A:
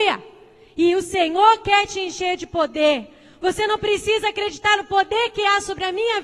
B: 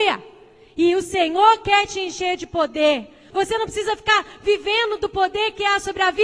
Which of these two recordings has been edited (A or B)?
B